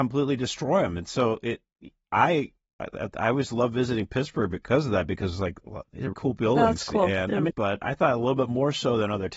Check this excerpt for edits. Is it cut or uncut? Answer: cut